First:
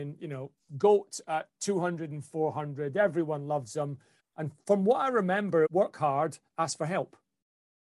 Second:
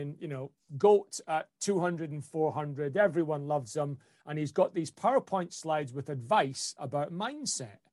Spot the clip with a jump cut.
first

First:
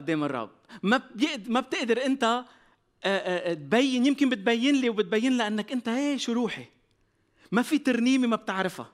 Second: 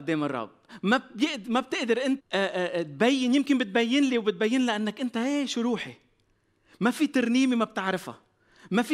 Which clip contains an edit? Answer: second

